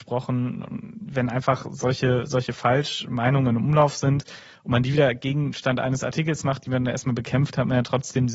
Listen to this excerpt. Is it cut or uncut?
uncut